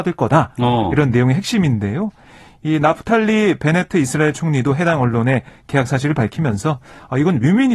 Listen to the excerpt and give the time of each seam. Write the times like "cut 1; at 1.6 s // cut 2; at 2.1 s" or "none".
none